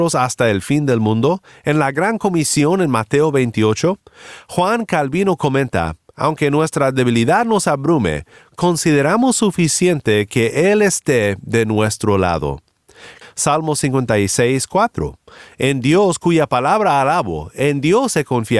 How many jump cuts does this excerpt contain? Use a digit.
1